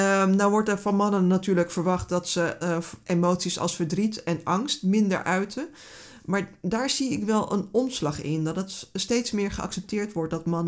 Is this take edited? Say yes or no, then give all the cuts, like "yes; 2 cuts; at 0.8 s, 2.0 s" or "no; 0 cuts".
yes; 1 cut; at 2.6 s